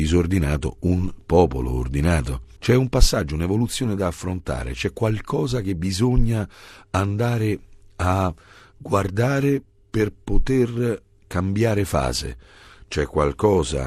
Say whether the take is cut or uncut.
cut